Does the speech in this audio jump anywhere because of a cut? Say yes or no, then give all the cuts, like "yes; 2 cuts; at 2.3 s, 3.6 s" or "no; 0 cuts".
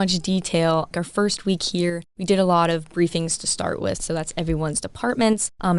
yes; 1 cut; at 3.9 s